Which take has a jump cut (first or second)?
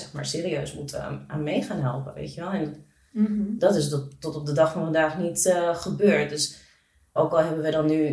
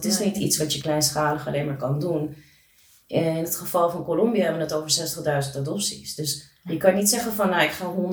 first